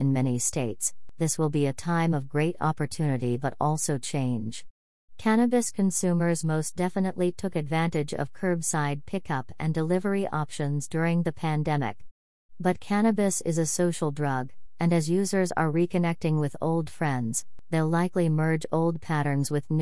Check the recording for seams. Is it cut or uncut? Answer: uncut